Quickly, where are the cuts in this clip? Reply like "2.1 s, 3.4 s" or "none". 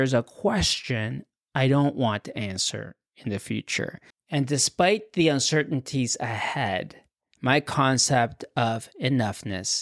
4.1 s